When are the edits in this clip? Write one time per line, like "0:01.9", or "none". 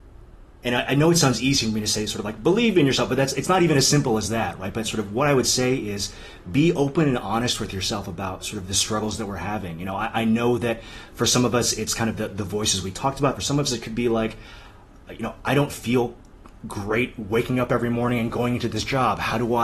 none